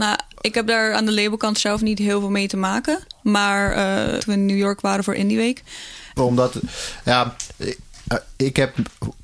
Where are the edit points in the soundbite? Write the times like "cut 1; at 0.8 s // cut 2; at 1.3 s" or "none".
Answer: cut 1; at 4.2 s // cut 2; at 6.2 s // cut 3; at 8.0 s